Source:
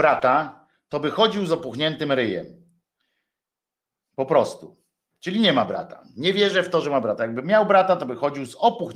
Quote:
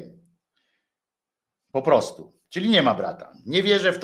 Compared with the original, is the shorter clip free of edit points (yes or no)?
no